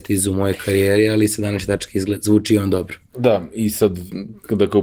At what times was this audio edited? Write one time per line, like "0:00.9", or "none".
none